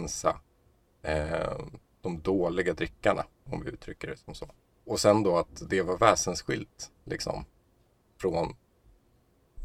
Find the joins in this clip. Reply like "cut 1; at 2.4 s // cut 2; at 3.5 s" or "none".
none